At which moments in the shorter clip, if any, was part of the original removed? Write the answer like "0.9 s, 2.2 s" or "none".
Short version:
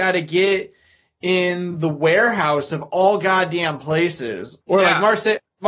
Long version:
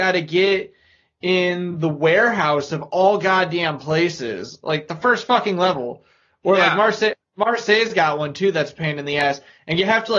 4.6 s